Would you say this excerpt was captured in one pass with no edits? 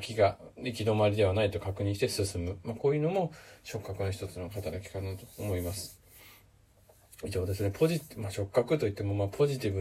yes; 0 cuts

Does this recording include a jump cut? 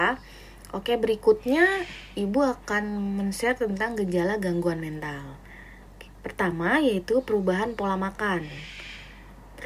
no; 0 cuts

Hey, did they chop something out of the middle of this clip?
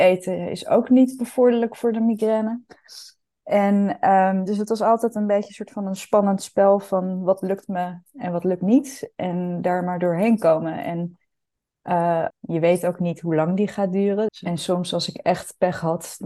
yes; 2 cuts; at 12.3 s, 14.3 s

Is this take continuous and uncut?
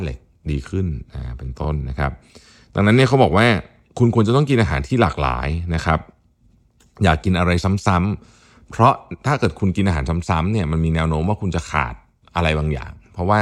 yes; 0 cuts

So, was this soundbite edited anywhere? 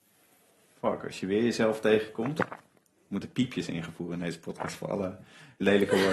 no; 0 cuts

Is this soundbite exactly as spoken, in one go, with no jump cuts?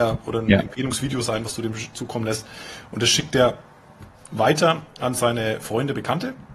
yes; 0 cuts

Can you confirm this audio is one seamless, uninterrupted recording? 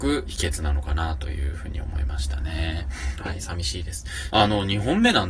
no; 2 cuts; at 3.2 s, 4.3 s

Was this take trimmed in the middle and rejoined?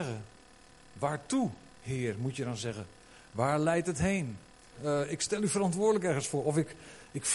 yes; 1 cut; at 4.7 s

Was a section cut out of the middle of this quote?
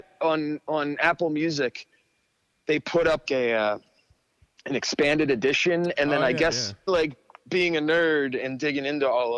yes; 2 cuts; at 3.3 s, 6.9 s

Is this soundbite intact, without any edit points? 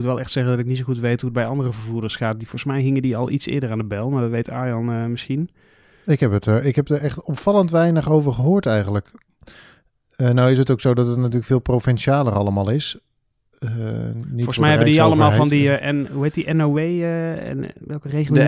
yes; 0 cuts

